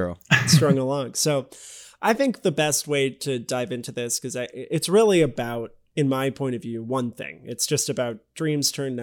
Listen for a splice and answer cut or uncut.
uncut